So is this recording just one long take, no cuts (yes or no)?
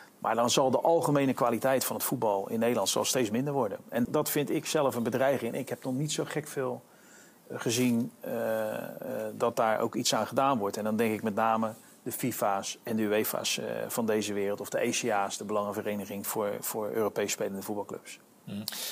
no